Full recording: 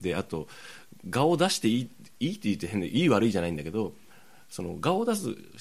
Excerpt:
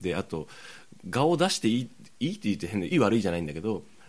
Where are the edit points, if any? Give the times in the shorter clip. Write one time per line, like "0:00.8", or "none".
0:02.9

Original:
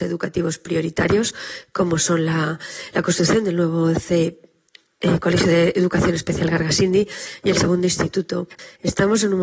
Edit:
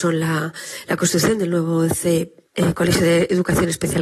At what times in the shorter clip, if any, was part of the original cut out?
0:02.5

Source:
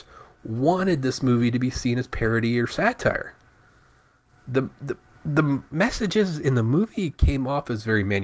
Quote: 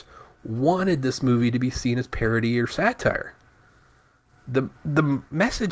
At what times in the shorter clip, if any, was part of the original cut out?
0:04.7

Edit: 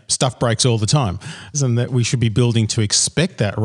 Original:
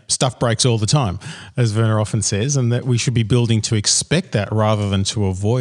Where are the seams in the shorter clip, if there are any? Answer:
0:01.5

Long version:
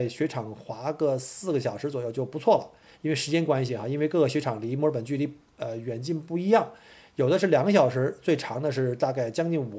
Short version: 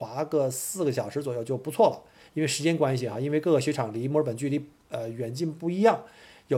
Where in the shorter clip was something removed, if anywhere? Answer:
none

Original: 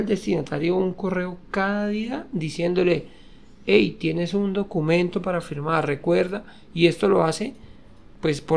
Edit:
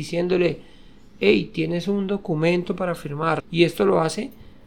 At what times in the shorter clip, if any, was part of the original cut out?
0:03.4

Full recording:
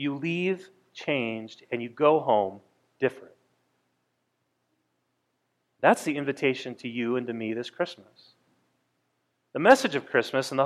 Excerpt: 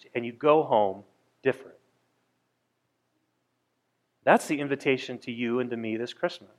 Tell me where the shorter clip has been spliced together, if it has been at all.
none

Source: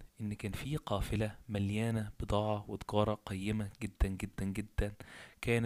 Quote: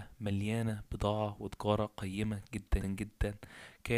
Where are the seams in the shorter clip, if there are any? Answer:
0:02.8

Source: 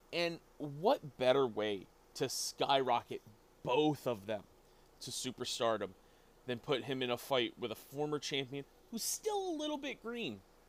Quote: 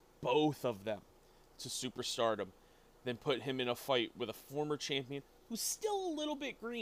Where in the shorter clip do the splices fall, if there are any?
none

